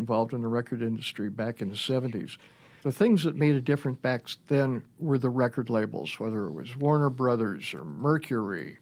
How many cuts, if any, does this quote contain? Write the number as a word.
zero